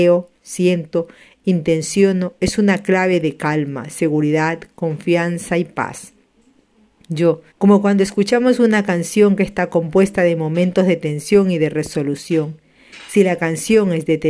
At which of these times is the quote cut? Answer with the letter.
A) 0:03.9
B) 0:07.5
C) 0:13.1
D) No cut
B